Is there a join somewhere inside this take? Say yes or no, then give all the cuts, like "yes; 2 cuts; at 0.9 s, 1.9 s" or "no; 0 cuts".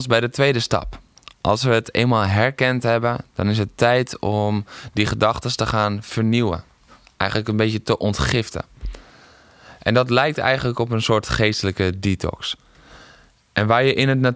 no; 0 cuts